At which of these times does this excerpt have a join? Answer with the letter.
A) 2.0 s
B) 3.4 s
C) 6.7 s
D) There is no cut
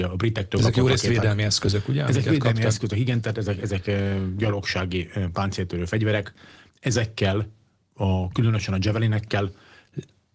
D